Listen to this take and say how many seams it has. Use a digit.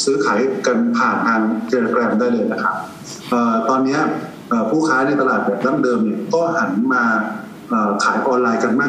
0